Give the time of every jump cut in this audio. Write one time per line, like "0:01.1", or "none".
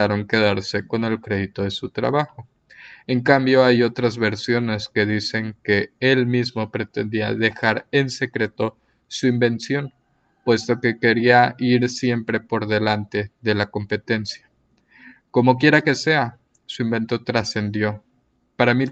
none